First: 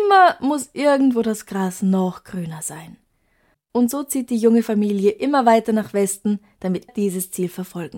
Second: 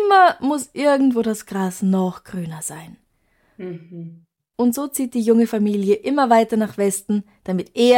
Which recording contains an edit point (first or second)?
first